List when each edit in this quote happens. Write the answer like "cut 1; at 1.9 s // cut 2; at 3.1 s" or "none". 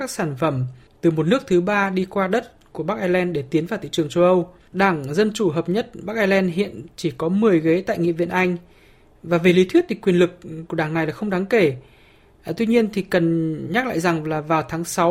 cut 1; at 4.7 s